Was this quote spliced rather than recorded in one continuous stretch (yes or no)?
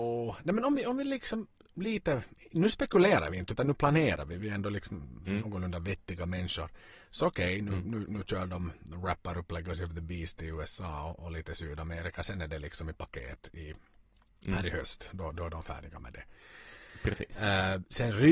no